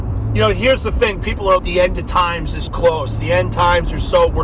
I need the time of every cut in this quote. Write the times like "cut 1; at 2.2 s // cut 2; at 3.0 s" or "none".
cut 1; at 1.6 s // cut 2; at 2.7 s